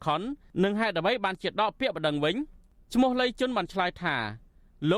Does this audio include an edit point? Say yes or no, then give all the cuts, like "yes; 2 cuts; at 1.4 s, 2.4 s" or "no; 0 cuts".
no; 0 cuts